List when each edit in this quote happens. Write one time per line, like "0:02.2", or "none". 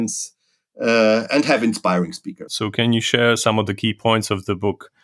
0:02.5